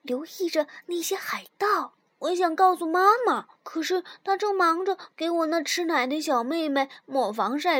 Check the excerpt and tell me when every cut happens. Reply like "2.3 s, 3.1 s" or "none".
2.1 s, 3.5 s